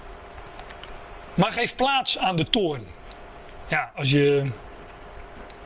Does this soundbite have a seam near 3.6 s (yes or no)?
no